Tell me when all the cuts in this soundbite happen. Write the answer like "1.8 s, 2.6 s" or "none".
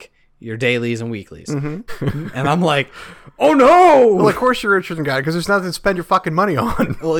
1.9 s